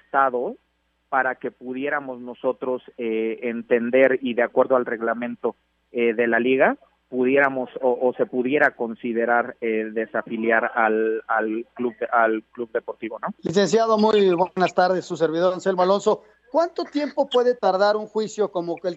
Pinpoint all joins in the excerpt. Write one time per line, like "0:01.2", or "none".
none